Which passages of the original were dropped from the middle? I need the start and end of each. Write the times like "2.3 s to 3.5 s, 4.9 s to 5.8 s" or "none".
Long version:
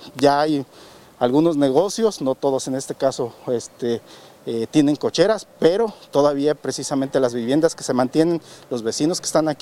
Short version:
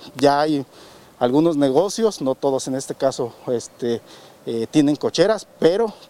none